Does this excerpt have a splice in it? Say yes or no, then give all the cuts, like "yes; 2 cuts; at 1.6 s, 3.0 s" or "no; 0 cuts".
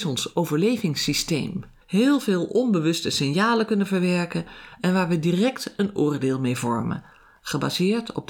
yes; 1 cut; at 1.8 s